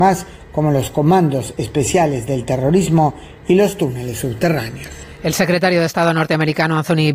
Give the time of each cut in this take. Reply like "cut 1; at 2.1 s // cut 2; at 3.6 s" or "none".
none

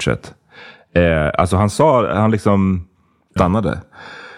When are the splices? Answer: cut 1; at 3.4 s

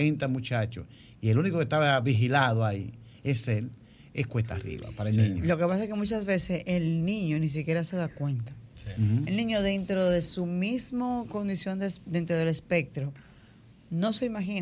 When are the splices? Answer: none

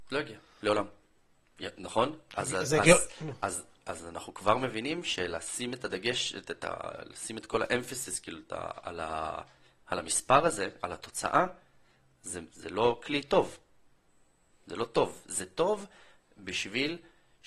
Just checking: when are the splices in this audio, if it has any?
cut 1; at 12.5 s

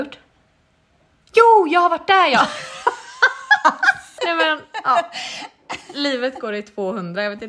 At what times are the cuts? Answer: cut 1; at 4.2 s

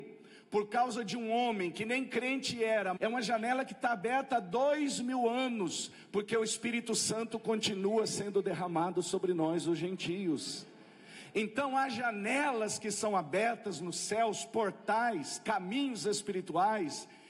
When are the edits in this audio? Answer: cut 1; at 3.0 s

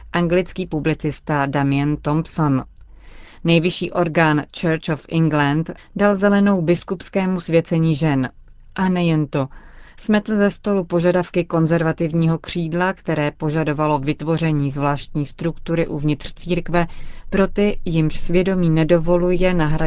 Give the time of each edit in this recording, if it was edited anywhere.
cut 1; at 5.8 s

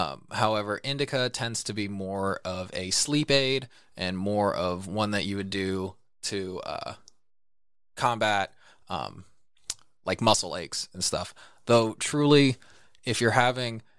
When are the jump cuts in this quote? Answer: none

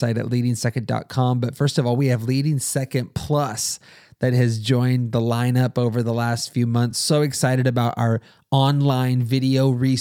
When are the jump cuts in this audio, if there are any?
none

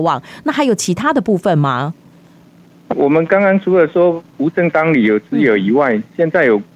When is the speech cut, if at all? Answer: cut 1; at 2.9 s

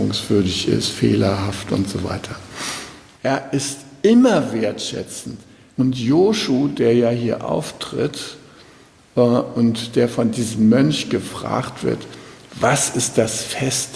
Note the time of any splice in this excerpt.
cut 1; at 3.2 s // cut 2; at 5.8 s

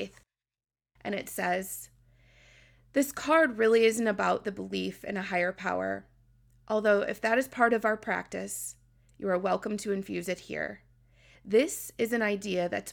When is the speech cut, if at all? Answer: cut 1; at 11.3 s

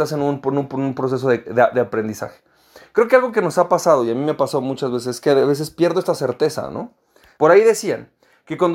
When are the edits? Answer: cut 1; at 7.4 s

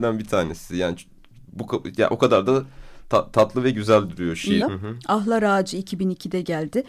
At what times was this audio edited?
cut 1; at 4.6 s

